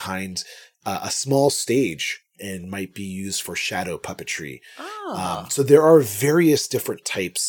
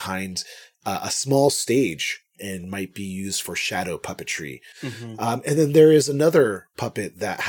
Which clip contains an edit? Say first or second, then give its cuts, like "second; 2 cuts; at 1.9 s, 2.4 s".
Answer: second; 1 cut; at 4.7 s